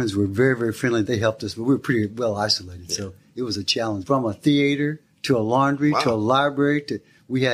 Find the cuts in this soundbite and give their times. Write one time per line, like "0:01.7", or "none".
0:01.0
0:04.0